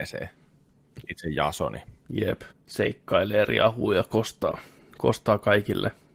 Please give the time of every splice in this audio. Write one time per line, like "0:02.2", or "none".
0:01.0
0:02.5

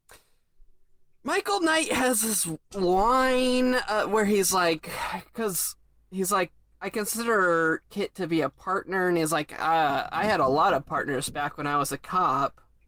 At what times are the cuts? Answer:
none

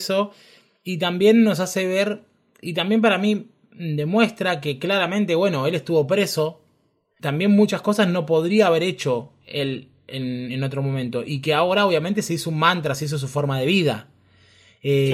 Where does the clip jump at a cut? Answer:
0:07.2

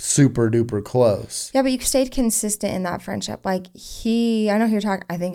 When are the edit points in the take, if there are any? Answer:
none

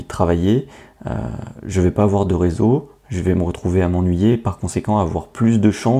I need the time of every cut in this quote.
none

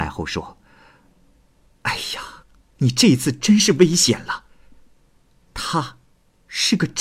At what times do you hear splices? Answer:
0:02.6

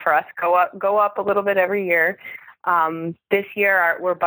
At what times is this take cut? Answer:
none

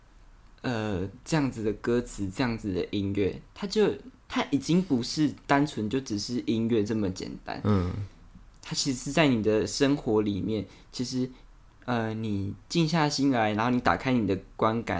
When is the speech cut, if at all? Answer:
none

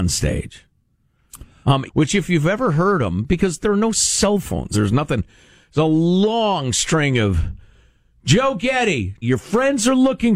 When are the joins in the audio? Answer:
0:01.9
0:04.7
0:09.2

